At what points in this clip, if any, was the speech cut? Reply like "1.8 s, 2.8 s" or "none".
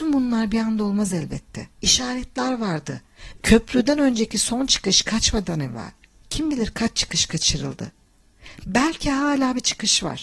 1.7 s, 3.4 s